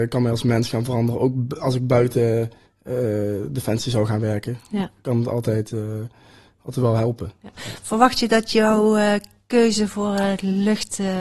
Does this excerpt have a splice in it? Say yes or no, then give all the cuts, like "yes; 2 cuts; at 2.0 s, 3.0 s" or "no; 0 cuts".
no; 0 cuts